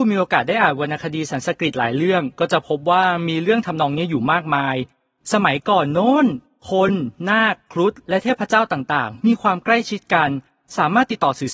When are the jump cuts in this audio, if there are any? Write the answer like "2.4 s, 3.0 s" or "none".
none